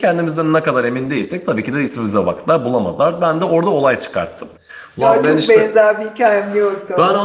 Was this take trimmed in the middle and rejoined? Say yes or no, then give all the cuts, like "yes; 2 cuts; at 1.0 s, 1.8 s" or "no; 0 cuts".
no; 0 cuts